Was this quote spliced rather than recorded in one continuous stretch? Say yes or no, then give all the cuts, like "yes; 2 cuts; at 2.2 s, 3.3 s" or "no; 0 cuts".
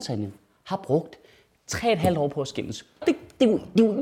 yes; 1 cut; at 3.0 s